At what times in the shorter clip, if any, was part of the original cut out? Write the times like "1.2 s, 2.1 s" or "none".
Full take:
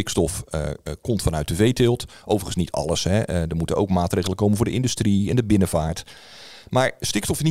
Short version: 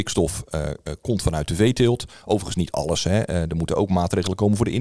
none